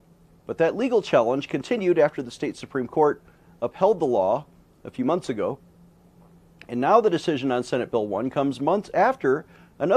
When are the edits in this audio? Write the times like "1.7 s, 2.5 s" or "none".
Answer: none